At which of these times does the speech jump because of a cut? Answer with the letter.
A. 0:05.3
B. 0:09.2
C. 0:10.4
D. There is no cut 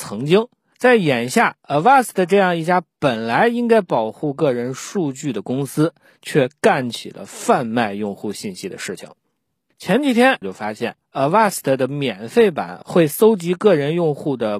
C